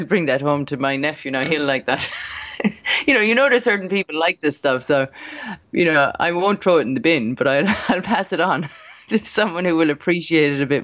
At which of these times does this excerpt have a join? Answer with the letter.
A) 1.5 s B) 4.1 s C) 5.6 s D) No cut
D